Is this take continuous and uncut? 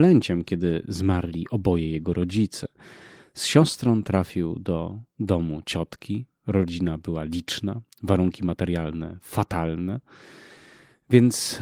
yes; 0 cuts

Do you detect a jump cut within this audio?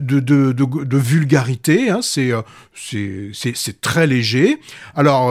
no; 0 cuts

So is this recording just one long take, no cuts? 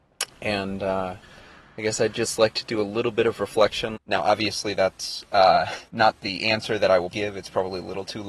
no; 3 cuts; at 4.0 s, 5.9 s, 7.1 s

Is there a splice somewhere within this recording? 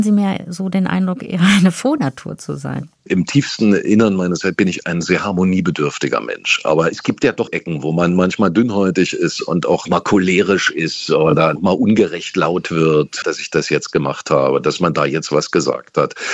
yes; 3 cuts; at 3.0 s, 7.5 s, 13.2 s

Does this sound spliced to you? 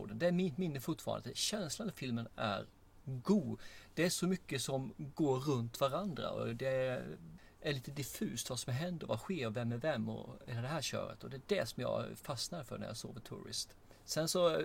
no; 0 cuts

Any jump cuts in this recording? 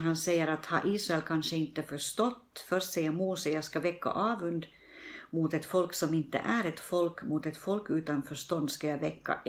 no; 0 cuts

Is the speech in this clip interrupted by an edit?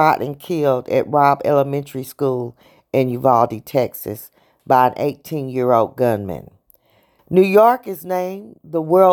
no; 0 cuts

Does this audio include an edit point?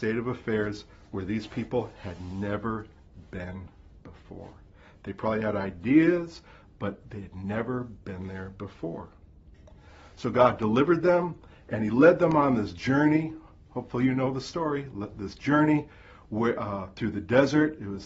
no; 0 cuts

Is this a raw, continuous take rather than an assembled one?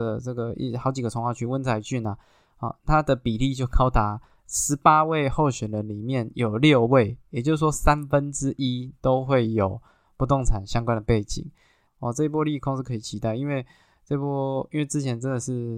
no; 1 cut; at 11.9 s

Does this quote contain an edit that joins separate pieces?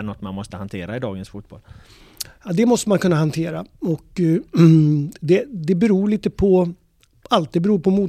no; 0 cuts

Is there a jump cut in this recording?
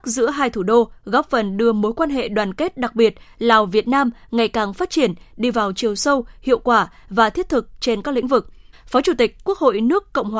yes; 1 cut; at 8.7 s

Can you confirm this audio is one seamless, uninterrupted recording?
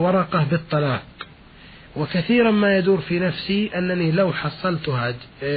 yes; 0 cuts

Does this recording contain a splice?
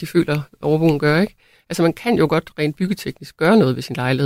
yes; 1 cut; at 1.6 s

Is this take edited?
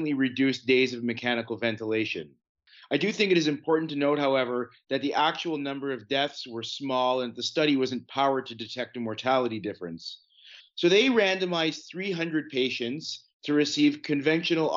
yes; 1 cut; at 10.6 s

